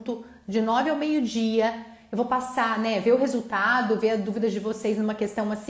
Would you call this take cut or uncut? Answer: uncut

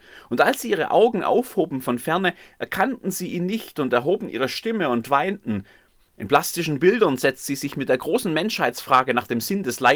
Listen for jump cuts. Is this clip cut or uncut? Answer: cut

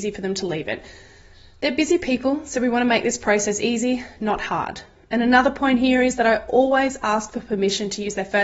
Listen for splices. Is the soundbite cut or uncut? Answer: uncut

